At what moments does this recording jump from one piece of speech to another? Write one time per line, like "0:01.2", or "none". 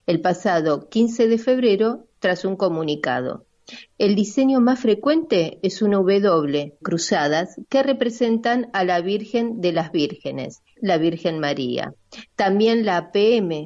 0:03.9
0:06.8
0:10.8

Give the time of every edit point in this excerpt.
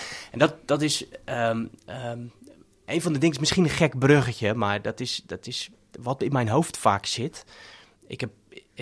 none

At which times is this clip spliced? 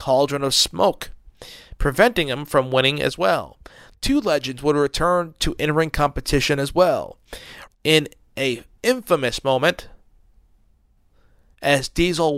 0:03.9
0:07.7

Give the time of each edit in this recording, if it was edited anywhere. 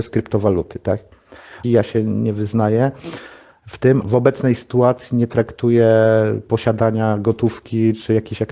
0:01.6
0:04.0

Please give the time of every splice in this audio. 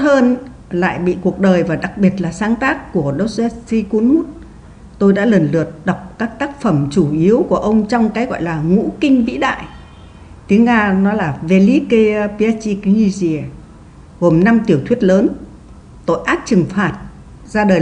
none

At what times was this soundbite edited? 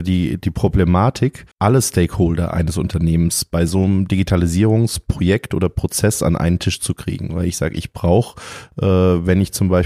0:01.5

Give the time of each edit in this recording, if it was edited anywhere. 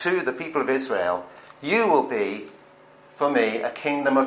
none

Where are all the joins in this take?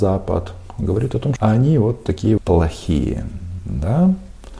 0:01.4
0:02.4

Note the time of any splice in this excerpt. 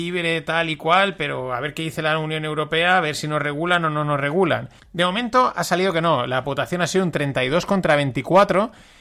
0:04.8

